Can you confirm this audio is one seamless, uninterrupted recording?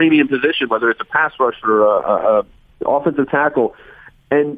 yes; 0 cuts

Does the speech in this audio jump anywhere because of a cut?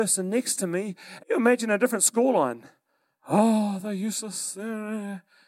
yes; 1 cut; at 1.2 s

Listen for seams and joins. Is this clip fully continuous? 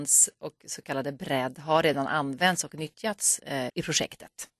no; 1 cut; at 3.7 s

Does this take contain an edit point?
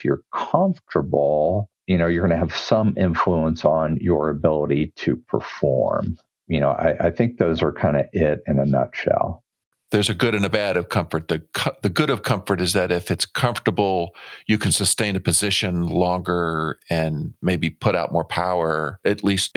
no; 0 cuts

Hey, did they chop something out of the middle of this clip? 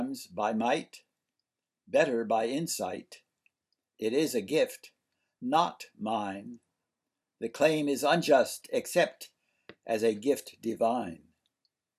no; 0 cuts

